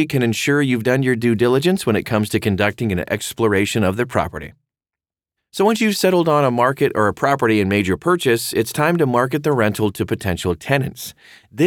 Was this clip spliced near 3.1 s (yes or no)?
no